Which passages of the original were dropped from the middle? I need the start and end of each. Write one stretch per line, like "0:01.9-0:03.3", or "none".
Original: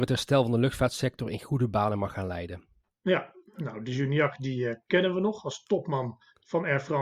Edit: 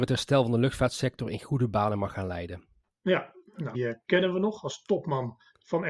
0:03.7-0:04.6